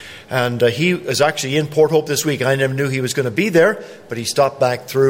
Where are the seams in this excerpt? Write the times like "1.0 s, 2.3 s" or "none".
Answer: none